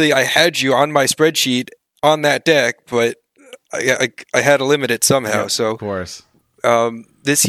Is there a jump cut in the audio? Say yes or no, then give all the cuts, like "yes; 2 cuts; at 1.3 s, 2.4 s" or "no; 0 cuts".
no; 0 cuts